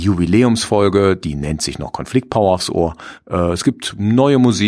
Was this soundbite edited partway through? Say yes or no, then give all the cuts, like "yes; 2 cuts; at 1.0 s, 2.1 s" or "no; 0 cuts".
yes; 1 cut; at 3.2 s